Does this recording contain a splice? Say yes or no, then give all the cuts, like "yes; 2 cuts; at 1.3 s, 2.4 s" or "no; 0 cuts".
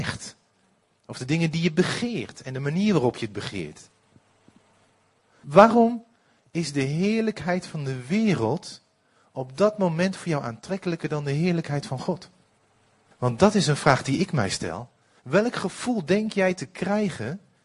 yes; 3 cuts; at 5.4 s, 13.1 s, 15.2 s